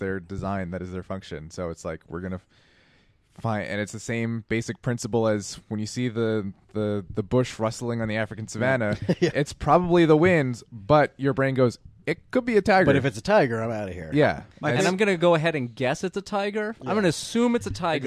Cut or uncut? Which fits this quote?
uncut